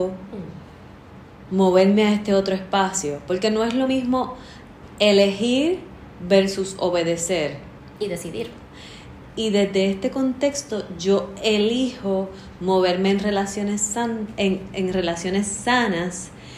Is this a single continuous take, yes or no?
yes